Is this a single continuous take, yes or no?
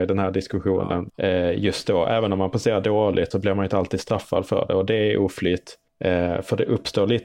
no